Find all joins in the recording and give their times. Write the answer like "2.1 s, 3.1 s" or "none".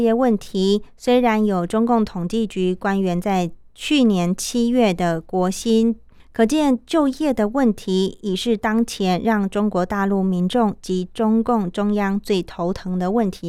6.2 s